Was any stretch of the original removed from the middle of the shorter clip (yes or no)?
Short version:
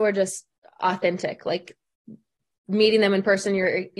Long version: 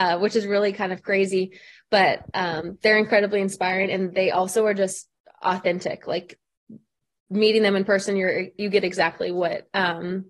no